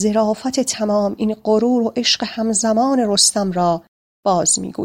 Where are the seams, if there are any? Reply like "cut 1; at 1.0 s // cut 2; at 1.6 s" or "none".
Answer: none

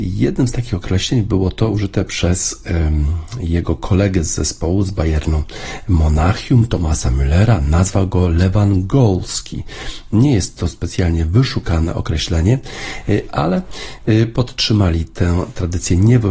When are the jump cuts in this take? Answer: none

